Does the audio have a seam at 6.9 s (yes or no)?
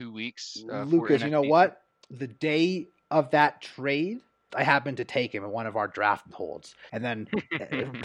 yes